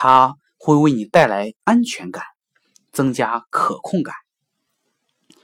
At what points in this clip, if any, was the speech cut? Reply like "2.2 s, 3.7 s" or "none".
none